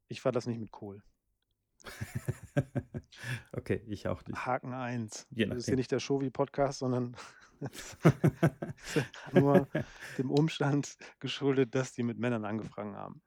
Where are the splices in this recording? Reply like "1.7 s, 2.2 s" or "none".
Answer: 5.3 s, 9.3 s